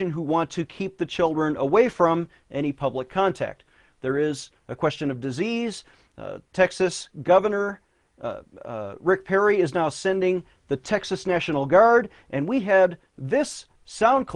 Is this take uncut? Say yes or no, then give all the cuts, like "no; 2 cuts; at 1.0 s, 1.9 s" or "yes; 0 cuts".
yes; 0 cuts